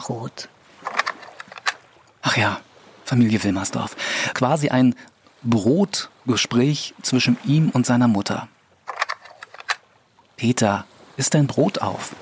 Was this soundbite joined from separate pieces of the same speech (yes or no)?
yes